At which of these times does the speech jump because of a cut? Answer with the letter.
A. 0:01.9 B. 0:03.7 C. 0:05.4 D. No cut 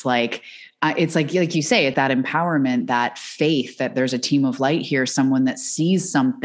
A